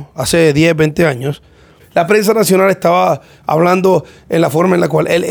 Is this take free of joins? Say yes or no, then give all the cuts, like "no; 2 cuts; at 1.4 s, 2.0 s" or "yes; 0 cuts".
no; 1 cut; at 1.8 s